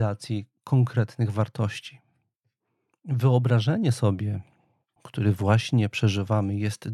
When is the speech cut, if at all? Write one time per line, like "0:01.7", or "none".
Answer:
0:02.9
0:05.0